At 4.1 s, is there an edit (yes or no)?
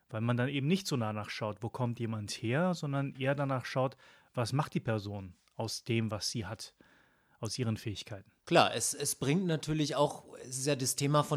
no